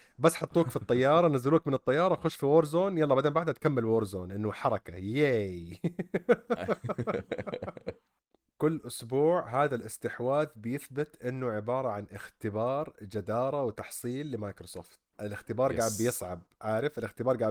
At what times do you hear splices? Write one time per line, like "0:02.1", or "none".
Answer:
0:15.1